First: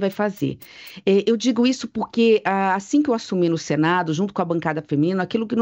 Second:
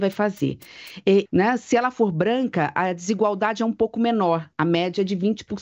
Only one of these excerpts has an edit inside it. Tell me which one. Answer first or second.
second